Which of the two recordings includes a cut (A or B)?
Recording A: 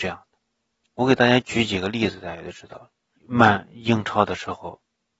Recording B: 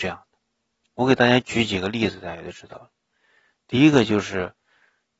A